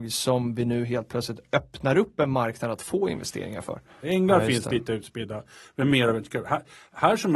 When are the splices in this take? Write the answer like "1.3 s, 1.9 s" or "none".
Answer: 4.0 s